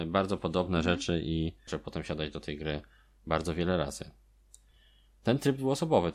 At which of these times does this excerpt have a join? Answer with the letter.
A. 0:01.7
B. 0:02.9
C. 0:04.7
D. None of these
A